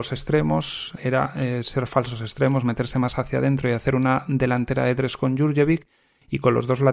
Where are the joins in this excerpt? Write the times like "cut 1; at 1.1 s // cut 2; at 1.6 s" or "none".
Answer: cut 1; at 1.0 s